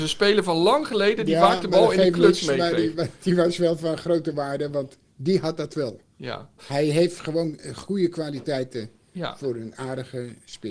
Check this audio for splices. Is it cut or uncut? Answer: cut